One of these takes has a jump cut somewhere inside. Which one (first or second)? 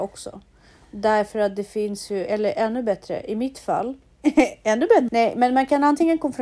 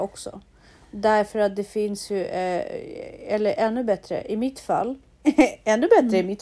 first